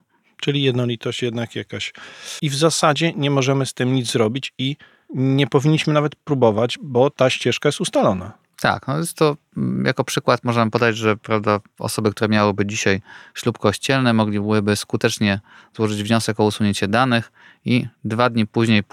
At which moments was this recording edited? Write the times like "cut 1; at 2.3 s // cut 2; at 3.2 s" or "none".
cut 1; at 2.4 s